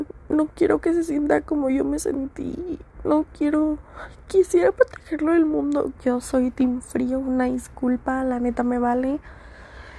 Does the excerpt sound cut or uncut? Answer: cut